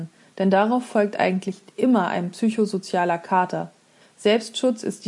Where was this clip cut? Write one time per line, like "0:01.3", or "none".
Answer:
0:04.0